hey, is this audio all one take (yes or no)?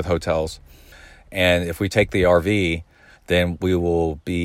no